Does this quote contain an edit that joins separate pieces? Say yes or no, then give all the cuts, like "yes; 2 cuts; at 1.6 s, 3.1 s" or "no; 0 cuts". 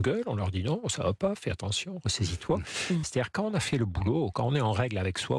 yes; 1 cut; at 3.0 s